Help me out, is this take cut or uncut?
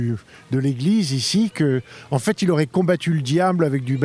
uncut